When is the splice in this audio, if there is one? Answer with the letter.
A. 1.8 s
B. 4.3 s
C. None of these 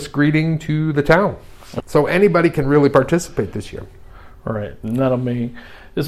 A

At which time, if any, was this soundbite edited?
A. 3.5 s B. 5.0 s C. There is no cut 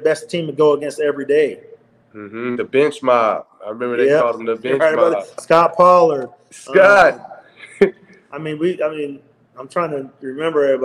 C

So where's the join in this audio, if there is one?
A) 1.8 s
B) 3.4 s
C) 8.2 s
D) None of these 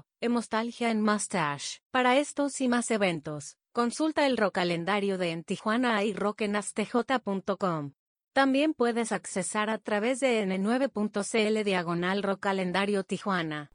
A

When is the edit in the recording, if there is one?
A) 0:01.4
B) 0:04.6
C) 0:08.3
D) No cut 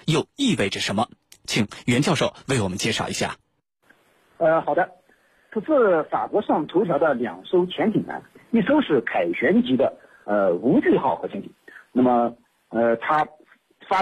D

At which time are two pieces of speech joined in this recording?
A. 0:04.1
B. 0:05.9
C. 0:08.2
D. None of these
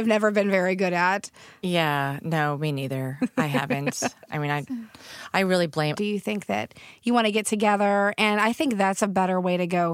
B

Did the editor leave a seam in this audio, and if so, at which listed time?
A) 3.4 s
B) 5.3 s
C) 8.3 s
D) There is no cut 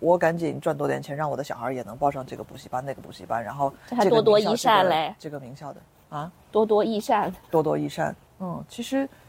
C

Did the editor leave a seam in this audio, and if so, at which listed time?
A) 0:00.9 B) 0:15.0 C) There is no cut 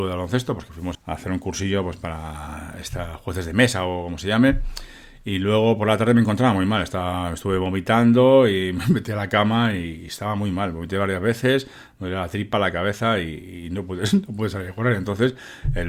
A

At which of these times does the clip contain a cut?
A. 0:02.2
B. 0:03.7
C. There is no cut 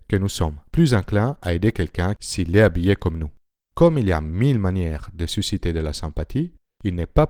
B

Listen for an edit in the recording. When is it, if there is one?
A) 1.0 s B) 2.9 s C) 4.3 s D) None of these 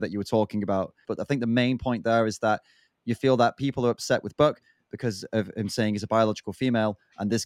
A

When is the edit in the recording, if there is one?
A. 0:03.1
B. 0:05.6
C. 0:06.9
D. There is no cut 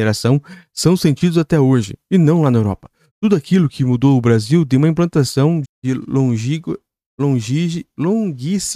B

